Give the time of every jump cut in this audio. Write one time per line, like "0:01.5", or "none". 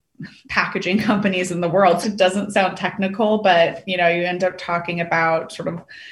0:02.0
0:03.8